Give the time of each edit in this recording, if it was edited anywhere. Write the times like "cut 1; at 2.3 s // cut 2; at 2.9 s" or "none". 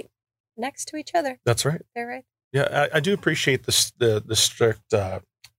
none